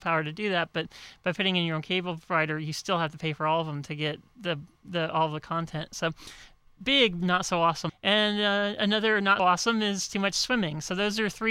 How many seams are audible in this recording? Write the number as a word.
two